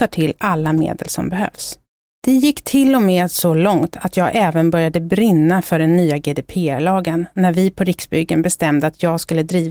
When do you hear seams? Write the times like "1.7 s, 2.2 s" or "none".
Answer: 2.0 s